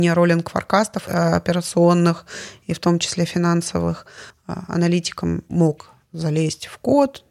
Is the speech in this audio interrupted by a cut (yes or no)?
yes